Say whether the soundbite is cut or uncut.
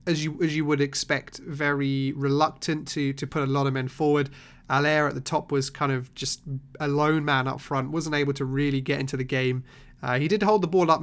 uncut